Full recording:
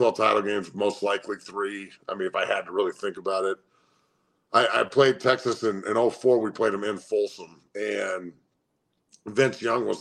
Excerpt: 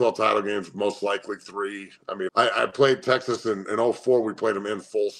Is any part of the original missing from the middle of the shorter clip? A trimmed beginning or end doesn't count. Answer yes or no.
yes